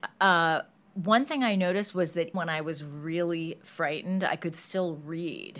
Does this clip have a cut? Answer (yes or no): yes